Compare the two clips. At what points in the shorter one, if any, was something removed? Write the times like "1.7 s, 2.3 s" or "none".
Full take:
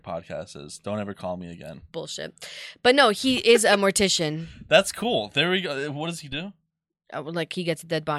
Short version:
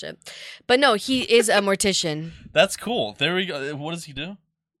none